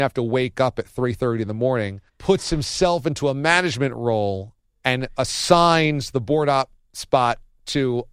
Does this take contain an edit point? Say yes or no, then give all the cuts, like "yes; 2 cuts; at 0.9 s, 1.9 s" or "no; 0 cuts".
yes; 1 cut; at 2.1 s